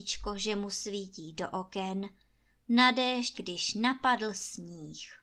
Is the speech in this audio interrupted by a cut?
yes; 1 cut; at 3.3 s

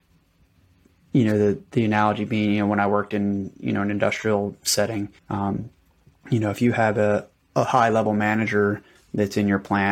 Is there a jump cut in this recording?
yes; 1 cut; at 5.2 s

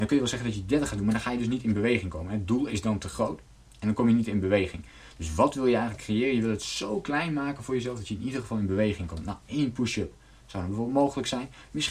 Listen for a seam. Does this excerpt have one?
no; 0 cuts

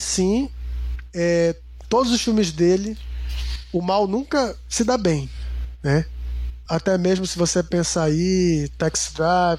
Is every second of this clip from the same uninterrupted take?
no; 1 cut; at 6.7 s

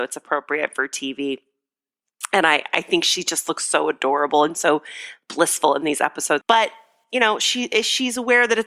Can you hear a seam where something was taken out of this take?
yes; 1 cut; at 6.4 s

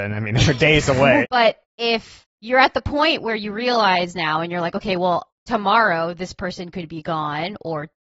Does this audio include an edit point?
yes; 2 cuts; at 1.2 s, 2.3 s

